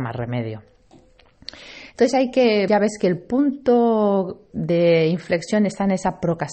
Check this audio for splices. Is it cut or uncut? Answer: cut